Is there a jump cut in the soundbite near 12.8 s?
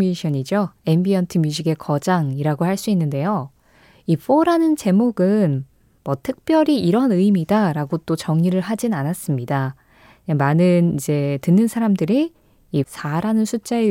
yes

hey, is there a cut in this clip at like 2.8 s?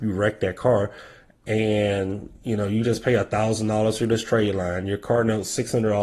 no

